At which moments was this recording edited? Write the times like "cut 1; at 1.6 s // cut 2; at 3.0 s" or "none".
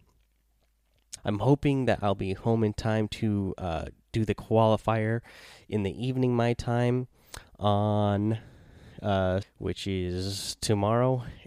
cut 1; at 1.2 s // cut 2; at 9.4 s